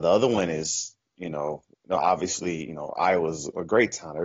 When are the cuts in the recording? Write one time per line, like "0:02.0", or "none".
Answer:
none